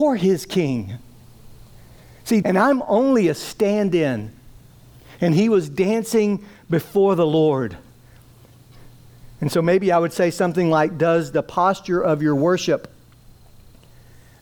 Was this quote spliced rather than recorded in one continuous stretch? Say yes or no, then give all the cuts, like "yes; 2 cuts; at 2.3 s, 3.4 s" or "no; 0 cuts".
yes; 1 cut; at 2.4 s